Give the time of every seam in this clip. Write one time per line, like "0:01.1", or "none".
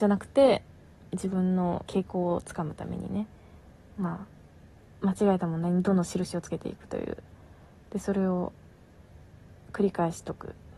0:01.9